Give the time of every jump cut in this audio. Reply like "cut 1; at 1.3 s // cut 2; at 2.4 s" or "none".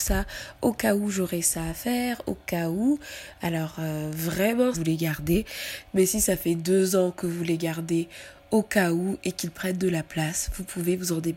cut 1; at 4.7 s